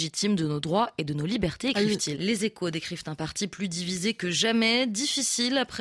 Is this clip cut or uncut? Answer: cut